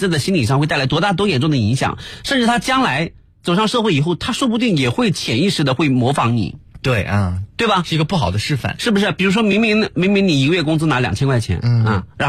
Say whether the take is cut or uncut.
uncut